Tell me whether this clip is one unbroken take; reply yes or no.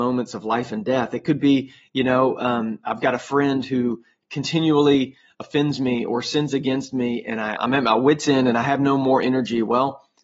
no